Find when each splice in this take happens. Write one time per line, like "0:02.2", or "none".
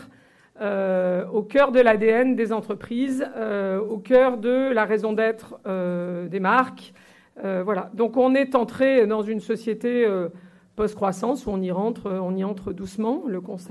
none

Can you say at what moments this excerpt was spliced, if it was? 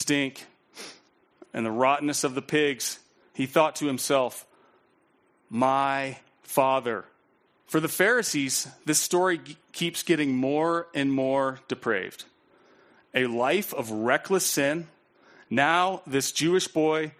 0:07.6

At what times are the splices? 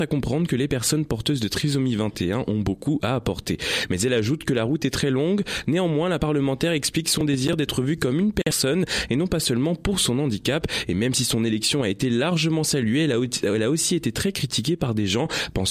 none

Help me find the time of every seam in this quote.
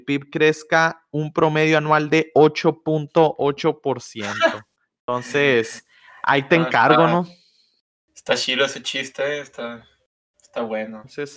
none

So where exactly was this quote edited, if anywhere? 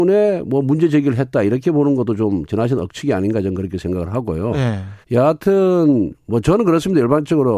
0:05.0

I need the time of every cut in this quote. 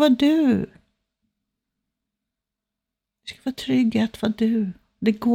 none

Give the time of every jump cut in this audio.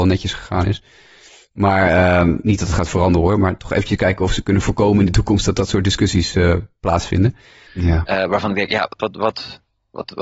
0:07.7
0:09.0

